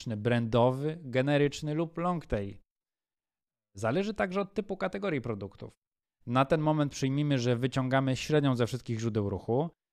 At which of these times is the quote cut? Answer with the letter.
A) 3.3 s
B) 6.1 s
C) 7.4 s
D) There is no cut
B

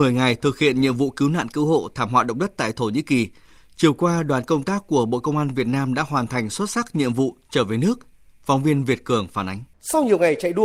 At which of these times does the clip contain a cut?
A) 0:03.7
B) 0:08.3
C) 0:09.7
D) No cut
C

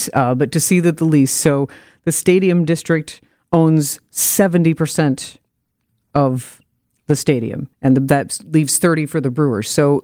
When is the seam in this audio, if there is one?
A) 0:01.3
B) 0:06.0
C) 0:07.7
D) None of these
C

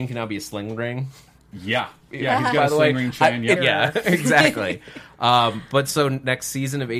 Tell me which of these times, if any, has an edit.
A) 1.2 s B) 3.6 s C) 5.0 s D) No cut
B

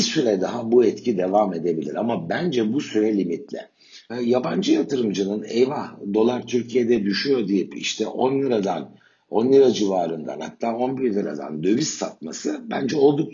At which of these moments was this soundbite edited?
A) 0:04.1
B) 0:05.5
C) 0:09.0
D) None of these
A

